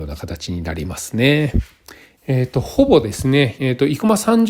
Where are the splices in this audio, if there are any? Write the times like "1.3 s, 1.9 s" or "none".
2.2 s, 3.6 s